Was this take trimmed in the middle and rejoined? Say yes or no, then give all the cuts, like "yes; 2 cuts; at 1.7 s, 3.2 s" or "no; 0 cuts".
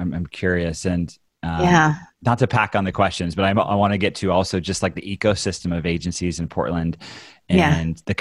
no; 0 cuts